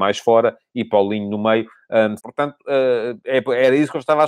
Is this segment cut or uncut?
cut